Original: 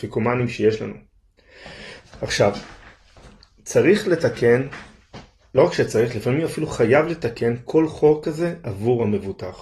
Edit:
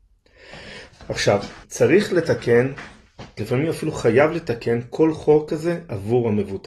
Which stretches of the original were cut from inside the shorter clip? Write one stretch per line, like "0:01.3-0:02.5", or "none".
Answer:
0:02.8-0:03.6
0:05.3-0:06.1

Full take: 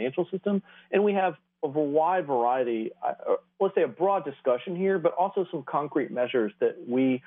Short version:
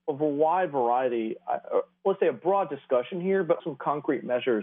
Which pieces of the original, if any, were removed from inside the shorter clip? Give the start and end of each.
0:05.2-0:05.5

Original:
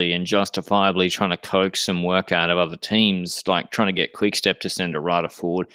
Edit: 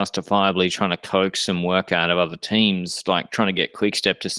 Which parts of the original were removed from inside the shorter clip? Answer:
none

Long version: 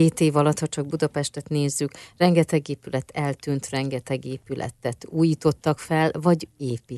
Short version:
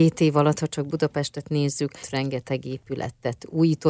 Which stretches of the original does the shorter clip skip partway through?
0:02.0-0:03.6

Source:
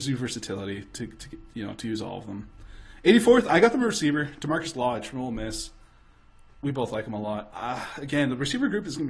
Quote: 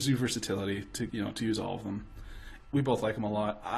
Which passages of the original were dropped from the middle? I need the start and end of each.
0:01.1-0:01.5
0:03.0-0:06.5

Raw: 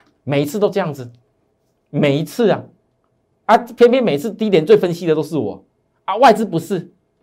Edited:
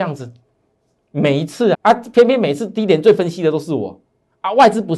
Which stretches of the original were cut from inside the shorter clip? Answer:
0:02.5-0:03.4

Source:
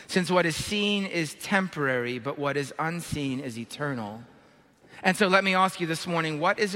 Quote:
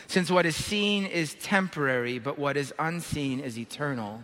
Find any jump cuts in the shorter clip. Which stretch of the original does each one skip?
none

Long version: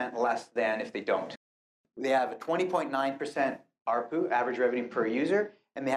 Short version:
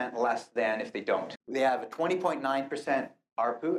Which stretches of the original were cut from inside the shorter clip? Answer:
0:01.4-0:01.9

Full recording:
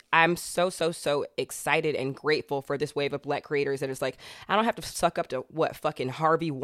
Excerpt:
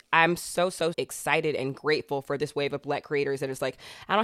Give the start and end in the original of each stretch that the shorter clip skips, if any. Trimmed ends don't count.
0:00.9-0:01.3

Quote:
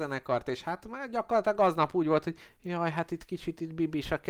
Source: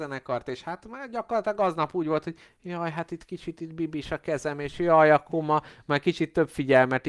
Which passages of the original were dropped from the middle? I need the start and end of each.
none

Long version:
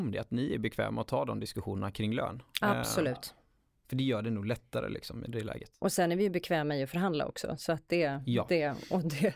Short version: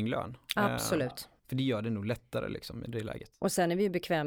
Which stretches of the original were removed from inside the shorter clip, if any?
0:03.4-0:03.8

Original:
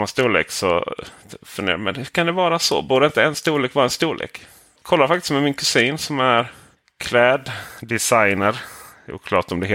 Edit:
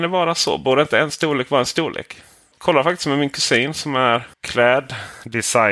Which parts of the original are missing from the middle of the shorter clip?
0:06.6-0:06.9

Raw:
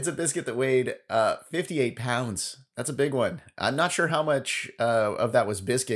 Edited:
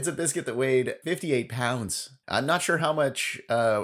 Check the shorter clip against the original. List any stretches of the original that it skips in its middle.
0:01.0-0:01.5
0:02.7-0:03.5

